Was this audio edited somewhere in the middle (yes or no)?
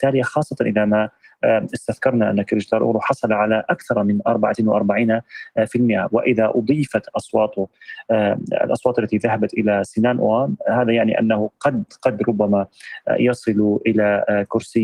no